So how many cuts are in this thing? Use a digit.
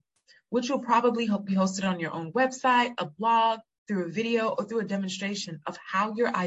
0